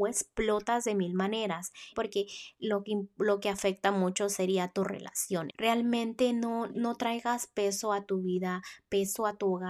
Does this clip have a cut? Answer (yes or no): yes